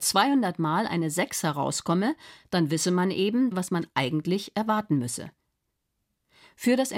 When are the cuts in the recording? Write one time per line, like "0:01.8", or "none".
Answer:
0:03.5